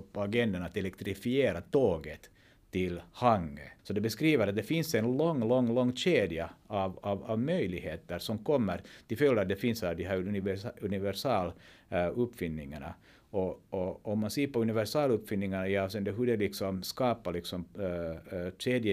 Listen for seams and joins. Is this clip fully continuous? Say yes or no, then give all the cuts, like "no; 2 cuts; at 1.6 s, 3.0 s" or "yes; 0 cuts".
no; 1 cut; at 3.8 s